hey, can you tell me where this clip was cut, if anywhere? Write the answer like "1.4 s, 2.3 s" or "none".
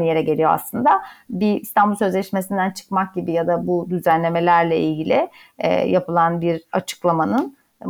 none

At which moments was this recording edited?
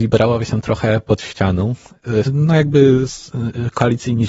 2.2 s

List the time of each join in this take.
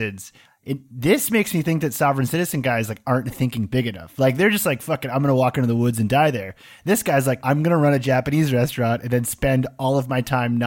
7.4 s

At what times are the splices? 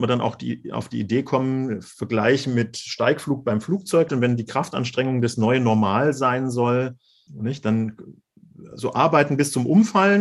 4.1 s, 7.3 s

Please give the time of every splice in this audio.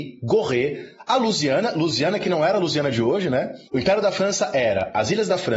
3.7 s

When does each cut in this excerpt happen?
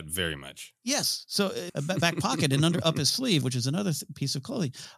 1.7 s, 3.4 s

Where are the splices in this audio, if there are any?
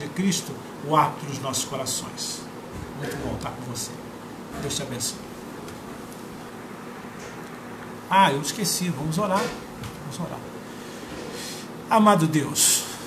none

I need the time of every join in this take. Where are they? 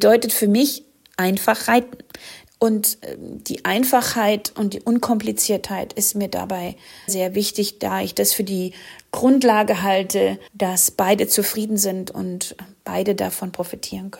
2.5 s, 7.1 s, 10.5 s

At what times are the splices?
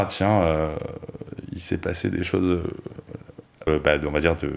3.7 s

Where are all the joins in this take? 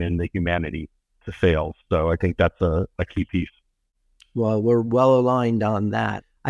none

